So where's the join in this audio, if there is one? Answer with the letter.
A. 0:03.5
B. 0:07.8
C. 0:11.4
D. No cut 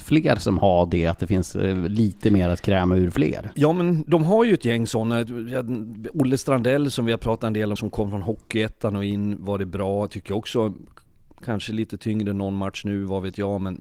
B